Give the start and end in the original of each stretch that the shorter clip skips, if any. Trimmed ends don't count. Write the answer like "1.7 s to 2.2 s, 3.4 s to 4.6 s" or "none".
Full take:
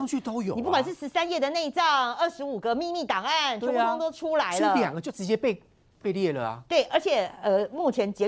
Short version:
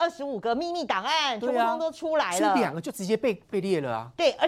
5.6 s to 5.9 s

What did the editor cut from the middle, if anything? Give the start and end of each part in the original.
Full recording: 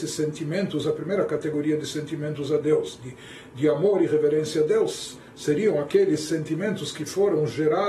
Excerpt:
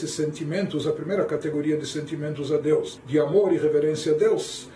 3.0 s to 3.5 s

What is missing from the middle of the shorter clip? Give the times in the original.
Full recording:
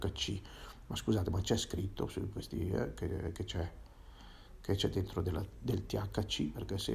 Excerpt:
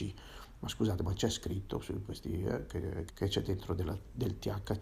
3.4 s to 4.6 s

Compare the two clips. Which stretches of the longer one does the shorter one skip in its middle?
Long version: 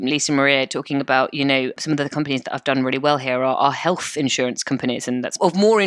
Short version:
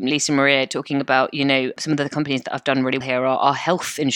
3.0 s to 3.2 s

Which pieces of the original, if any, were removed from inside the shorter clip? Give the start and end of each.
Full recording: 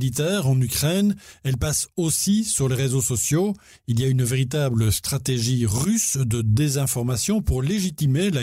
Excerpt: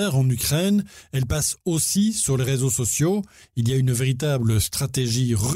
none

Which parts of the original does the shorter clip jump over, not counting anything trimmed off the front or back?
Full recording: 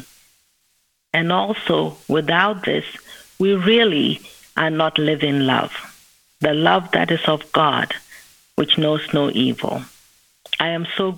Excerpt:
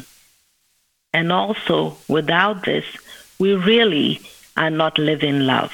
none

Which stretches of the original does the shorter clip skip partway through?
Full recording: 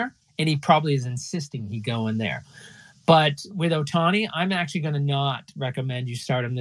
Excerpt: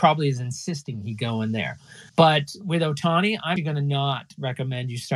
2.7 s to 3.0 s, 4.5 s to 4.7 s

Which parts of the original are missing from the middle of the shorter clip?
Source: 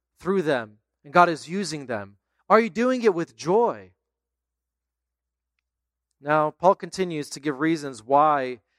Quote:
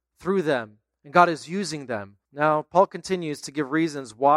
2.3 s to 6.1 s

